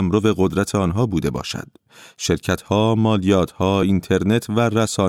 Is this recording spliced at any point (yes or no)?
no